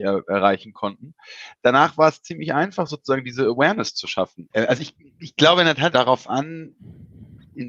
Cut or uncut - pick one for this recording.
cut